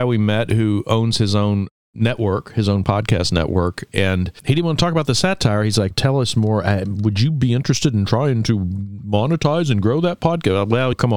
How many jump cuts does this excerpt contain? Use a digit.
1